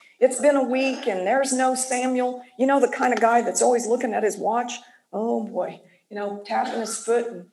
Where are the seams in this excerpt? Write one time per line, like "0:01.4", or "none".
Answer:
none